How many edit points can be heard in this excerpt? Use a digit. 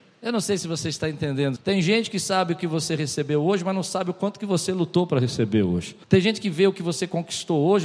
2